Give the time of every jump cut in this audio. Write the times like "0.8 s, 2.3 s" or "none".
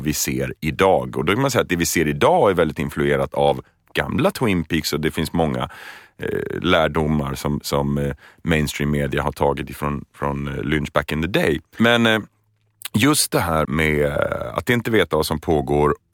11.7 s, 13.7 s